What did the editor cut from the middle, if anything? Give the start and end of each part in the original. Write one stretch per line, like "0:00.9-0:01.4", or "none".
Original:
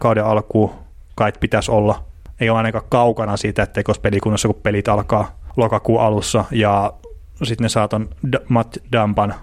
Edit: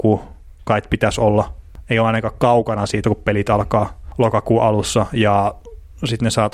0:03.5-0:04.4